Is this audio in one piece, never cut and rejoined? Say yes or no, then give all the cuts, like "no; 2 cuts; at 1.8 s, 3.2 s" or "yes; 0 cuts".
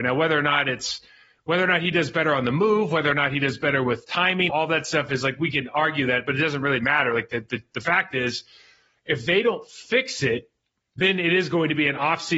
no; 1 cut; at 4.5 s